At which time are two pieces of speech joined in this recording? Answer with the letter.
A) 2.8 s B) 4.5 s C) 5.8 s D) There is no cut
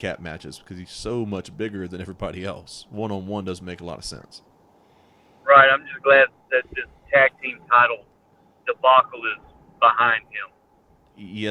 D